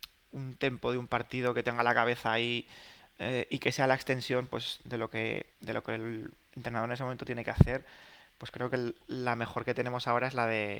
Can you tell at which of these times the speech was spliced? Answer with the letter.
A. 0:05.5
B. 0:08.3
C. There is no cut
A